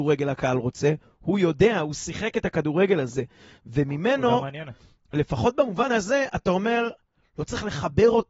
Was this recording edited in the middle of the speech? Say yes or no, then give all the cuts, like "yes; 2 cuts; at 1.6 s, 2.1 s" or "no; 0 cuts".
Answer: no; 0 cuts